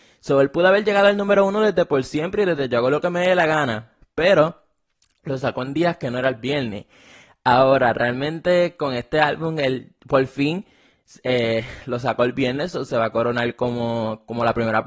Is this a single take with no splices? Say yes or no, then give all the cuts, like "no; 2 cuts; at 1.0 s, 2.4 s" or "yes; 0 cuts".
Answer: yes; 0 cuts